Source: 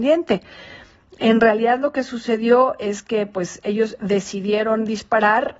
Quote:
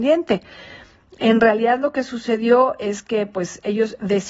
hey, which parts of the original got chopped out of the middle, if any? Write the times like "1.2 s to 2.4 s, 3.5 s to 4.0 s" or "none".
none